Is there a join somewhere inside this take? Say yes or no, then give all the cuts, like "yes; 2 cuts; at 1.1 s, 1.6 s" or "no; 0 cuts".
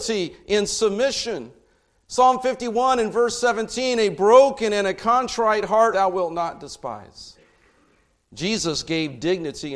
yes; 1 cut; at 5.9 s